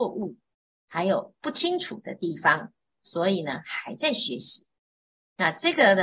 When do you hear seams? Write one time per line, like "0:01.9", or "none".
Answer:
none